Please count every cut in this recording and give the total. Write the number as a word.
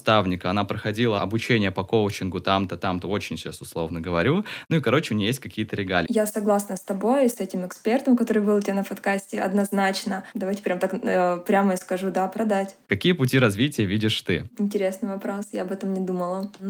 three